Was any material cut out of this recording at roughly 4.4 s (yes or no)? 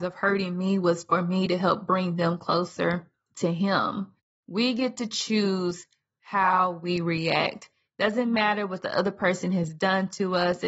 yes